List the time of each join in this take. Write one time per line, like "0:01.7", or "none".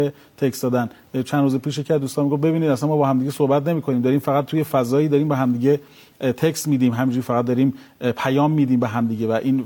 none

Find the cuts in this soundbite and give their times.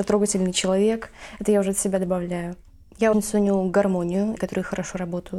0:03.1
0:04.4

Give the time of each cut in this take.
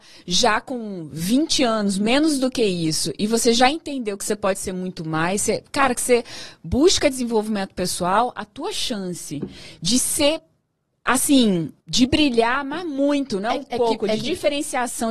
0:11.8

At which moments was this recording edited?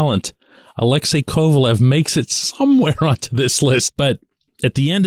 0:03.9

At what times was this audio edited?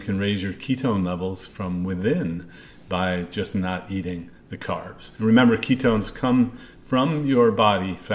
0:05.2

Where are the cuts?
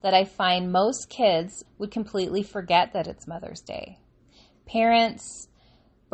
0:01.6

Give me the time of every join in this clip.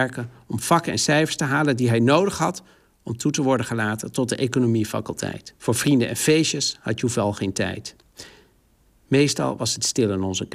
0:05.6

